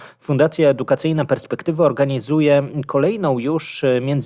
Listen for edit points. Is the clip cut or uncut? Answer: uncut